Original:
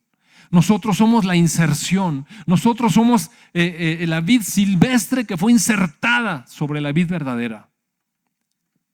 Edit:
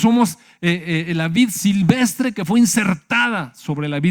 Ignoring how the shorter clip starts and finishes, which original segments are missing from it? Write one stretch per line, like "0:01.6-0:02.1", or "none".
none